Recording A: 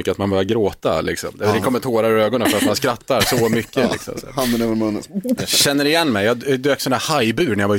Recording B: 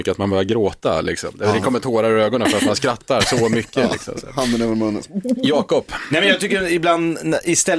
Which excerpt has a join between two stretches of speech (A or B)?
A